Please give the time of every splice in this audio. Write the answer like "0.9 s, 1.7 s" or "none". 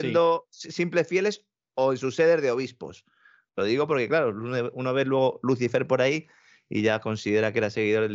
none